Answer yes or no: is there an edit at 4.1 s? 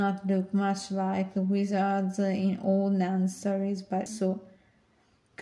yes